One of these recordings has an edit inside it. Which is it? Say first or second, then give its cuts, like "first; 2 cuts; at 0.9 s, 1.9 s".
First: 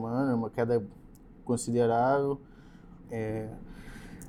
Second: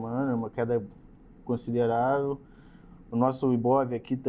first; 1 cut; at 3.0 s